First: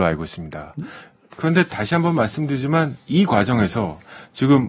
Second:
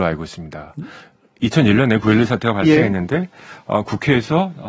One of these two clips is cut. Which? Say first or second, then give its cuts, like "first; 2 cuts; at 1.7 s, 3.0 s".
first; 1 cut; at 1.3 s